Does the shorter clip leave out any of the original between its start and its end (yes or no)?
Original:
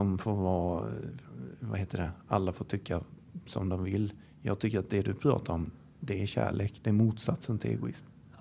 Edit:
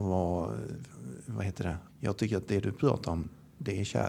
yes